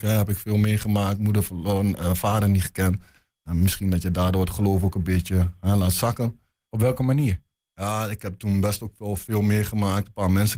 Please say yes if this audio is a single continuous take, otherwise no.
no